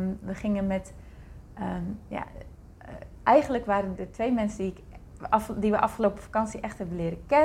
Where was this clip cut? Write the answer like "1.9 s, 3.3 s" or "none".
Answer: 4.0 s

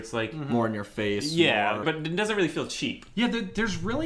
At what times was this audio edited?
1.8 s

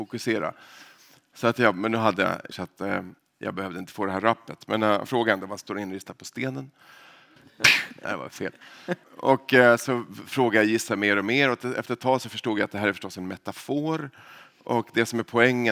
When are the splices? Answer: 2.5 s, 7.4 s

